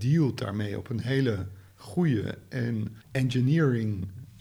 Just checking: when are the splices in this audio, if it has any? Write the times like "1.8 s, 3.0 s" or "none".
3.0 s